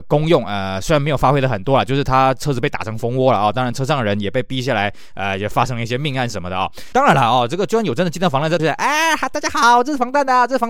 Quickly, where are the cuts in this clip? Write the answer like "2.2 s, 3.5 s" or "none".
6.9 s, 8.6 s